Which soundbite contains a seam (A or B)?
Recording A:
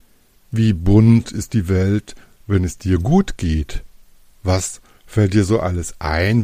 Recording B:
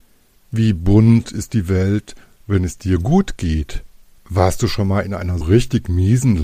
B